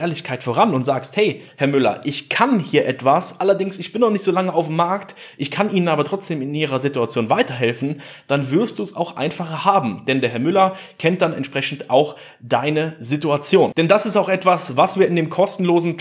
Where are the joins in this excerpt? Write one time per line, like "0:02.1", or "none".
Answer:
none